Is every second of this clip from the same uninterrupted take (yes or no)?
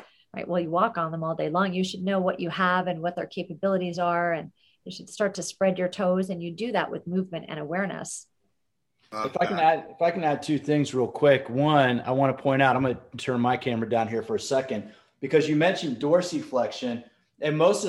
yes